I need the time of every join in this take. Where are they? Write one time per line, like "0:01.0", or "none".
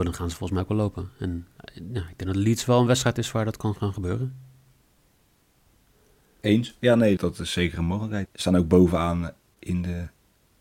0:07.2
0:08.3